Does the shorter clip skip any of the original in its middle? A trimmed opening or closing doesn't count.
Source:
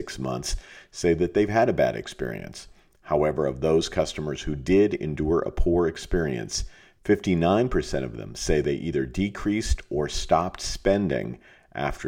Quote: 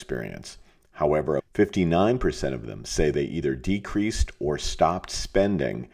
yes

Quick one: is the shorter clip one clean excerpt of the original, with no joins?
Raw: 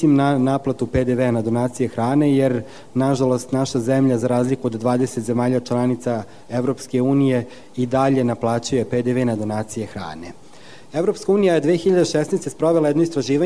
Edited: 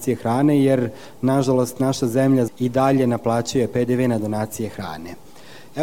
no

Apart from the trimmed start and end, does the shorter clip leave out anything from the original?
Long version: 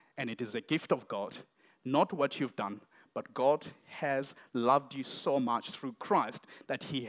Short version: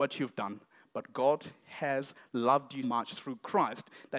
yes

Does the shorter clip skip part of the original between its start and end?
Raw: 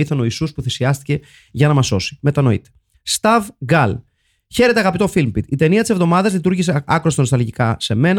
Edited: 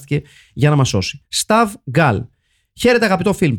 yes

